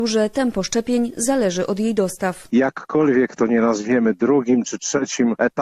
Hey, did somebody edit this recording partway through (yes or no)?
yes